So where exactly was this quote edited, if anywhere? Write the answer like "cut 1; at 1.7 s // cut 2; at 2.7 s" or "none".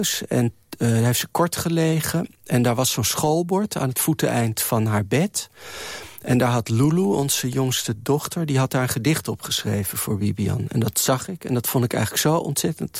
none